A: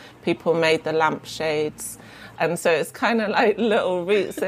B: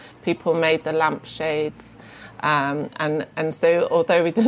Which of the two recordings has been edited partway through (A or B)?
A